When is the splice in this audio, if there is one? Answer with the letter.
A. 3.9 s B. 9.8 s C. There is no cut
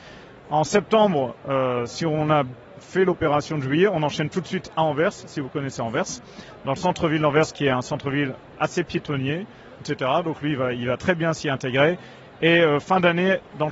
B